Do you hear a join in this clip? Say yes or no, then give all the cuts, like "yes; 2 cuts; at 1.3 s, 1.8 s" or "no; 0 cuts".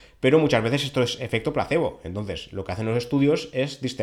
no; 0 cuts